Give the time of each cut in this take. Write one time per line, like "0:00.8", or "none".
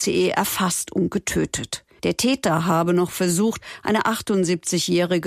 0:02.0

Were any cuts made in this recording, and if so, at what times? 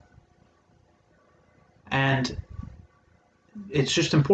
0:01.7

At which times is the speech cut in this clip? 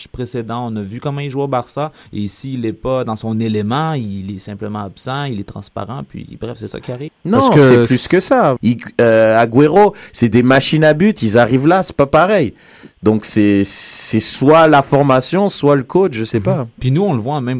0:07.1
0:08.6

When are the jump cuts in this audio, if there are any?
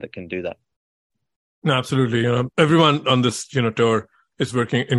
none

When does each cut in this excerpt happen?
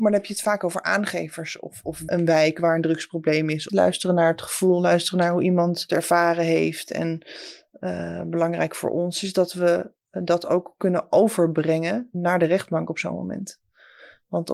0:03.7

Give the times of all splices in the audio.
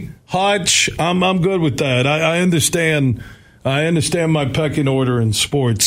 none

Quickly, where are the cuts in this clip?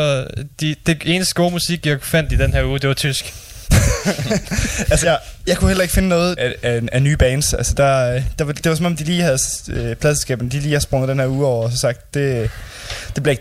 0:05.0
0:06.4

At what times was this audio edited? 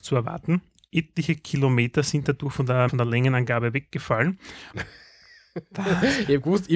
0:02.9
0:04.7

